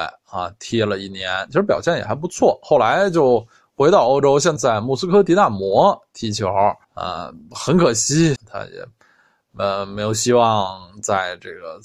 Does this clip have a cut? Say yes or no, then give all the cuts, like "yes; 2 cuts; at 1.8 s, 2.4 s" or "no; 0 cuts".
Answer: yes; 3 cuts; at 4.6 s, 6.8 s, 8.4 s